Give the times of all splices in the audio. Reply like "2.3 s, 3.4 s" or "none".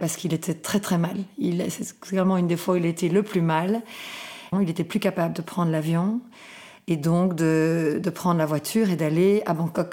4.5 s

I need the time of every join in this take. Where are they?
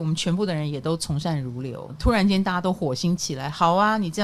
1.9 s

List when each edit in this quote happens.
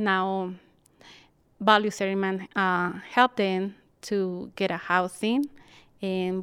none

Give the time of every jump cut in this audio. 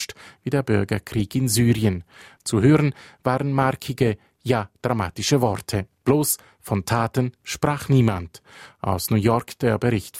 none

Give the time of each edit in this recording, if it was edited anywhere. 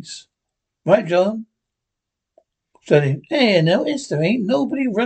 none

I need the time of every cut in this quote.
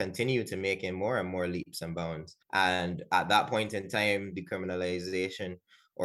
2.4 s, 4.3 s

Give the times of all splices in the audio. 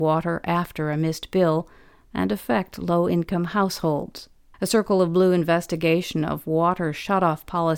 4.5 s

